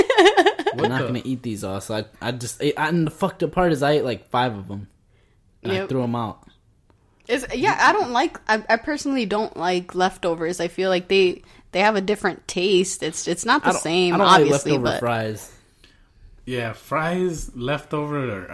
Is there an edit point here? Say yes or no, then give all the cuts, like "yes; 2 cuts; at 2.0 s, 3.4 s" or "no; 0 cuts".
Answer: no; 0 cuts